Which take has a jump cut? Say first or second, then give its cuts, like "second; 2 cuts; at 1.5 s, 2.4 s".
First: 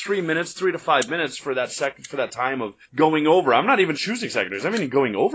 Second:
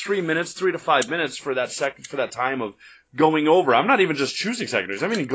first; 2 cuts; at 2.8 s, 4.0 s